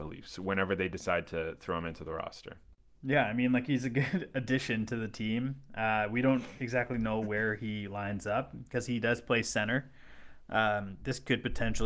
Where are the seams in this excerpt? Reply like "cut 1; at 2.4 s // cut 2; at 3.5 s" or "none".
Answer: none

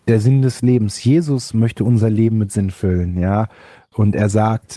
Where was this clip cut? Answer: none

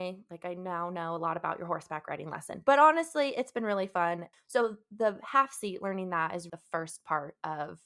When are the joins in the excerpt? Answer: cut 1; at 4.3 s // cut 2; at 6.5 s

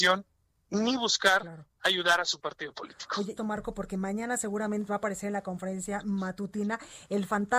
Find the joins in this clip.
cut 1; at 3.4 s // cut 2; at 4.9 s

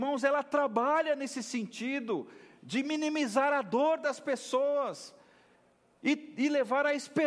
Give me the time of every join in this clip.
none

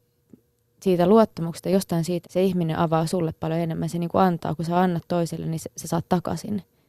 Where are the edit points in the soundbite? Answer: cut 1; at 2.2 s

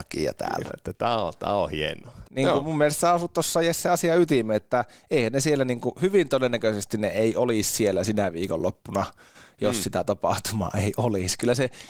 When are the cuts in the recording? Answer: cut 1; at 2.2 s

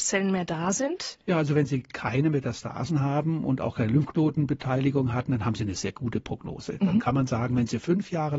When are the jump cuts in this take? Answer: none

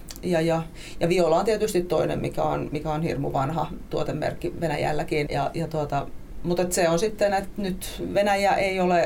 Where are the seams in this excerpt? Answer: cut 1; at 5.3 s

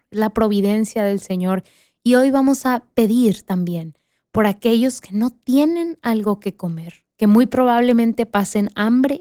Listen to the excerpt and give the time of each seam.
none

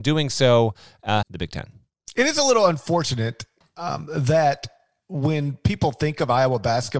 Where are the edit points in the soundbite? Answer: cut 1; at 1.2 s

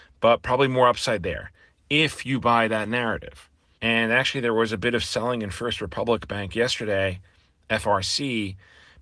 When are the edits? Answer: cut 1; at 3.8 s

